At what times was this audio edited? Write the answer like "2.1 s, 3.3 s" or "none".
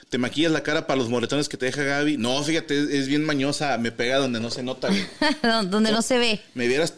none